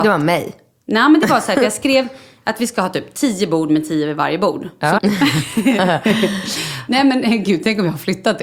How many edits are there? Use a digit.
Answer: 1